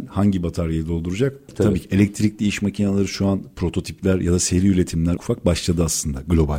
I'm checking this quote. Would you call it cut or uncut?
cut